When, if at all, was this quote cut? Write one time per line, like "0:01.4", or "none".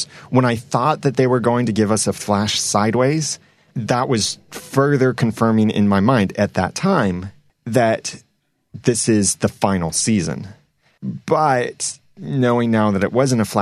none